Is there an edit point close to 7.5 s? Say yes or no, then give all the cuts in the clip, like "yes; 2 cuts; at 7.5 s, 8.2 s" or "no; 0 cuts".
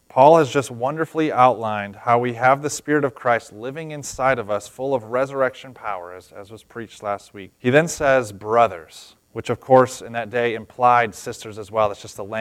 yes; 2 cuts; at 7.5 s, 9.2 s